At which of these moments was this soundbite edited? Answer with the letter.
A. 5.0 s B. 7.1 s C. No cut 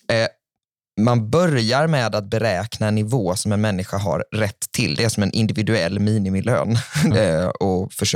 B